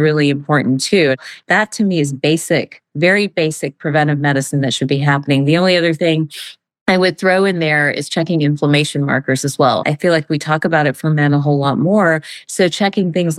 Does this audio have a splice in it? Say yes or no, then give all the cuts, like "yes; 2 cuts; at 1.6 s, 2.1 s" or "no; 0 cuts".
yes; 1 cut; at 9.8 s